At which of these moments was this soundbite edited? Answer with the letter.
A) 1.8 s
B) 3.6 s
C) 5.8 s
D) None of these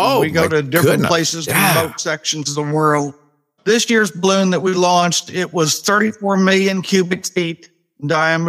B